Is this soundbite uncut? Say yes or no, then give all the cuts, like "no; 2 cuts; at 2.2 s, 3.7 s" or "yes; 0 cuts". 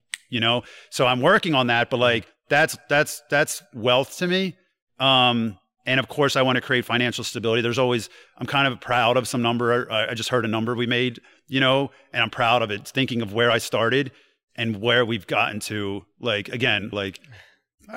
no; 2 cuts; at 12.3 s, 16.9 s